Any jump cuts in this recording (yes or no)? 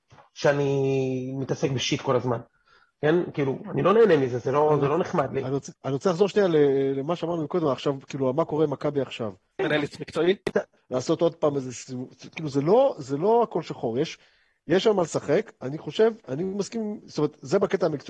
yes